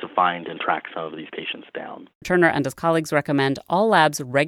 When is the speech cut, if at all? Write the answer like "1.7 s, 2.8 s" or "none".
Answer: 2.2 s